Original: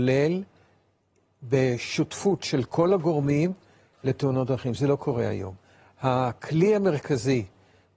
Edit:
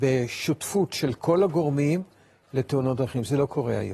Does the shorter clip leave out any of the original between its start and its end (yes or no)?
no